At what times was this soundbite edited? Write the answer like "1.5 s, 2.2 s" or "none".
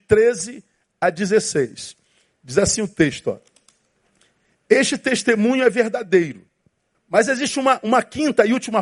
6.9 s